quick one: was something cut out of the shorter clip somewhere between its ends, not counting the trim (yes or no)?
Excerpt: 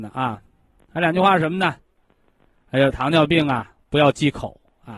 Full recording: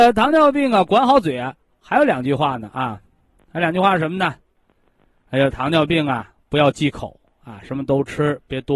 no